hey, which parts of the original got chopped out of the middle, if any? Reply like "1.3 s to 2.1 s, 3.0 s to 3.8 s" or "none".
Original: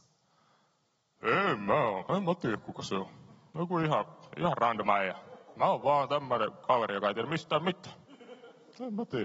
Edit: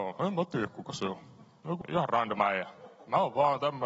3.7 s to 4.3 s